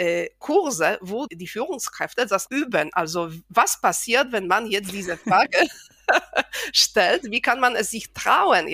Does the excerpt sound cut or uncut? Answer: cut